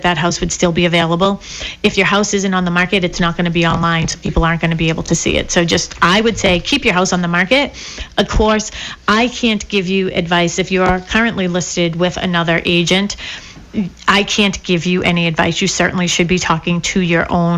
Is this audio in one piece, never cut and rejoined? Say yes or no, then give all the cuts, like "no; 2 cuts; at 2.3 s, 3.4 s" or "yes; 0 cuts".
yes; 0 cuts